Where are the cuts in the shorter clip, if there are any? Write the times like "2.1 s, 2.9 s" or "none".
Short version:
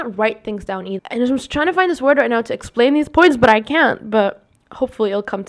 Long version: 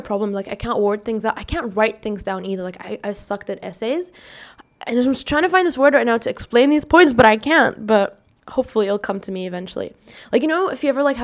1.0 s